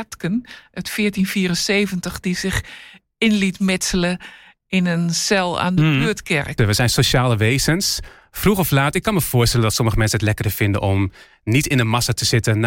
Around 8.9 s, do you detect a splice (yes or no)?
no